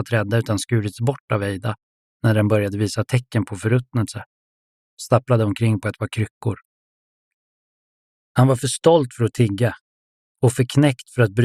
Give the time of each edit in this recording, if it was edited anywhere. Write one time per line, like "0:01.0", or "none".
none